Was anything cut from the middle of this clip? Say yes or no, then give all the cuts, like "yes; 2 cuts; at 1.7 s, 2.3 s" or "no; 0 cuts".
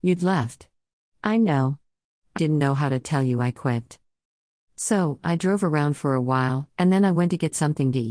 yes; 1 cut; at 2.4 s